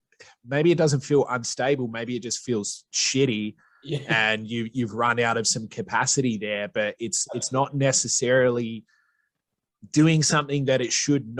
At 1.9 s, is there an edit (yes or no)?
no